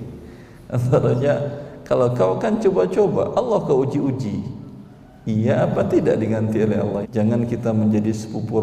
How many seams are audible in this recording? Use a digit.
1